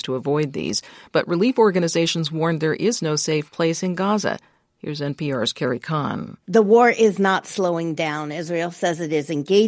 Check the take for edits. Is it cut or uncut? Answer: uncut